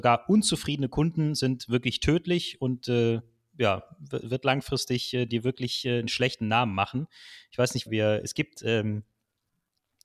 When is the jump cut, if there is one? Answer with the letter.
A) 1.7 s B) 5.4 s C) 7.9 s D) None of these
C